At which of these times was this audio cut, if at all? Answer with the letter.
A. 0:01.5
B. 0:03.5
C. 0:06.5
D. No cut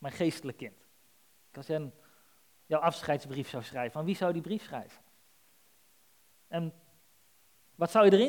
A